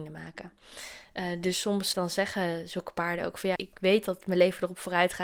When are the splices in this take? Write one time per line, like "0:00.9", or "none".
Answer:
0:01.9
0:03.6